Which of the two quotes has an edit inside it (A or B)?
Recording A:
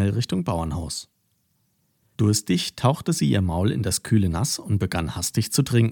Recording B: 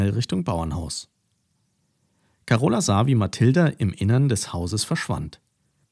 A